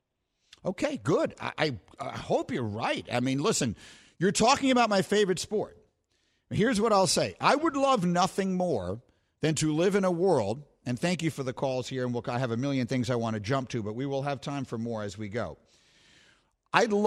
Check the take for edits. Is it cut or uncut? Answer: uncut